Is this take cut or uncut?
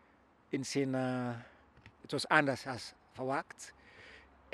cut